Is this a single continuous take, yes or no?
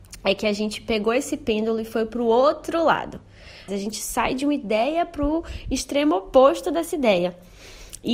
no